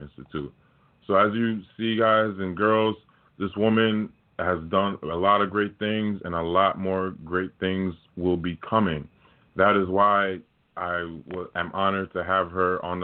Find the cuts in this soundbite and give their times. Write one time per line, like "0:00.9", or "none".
none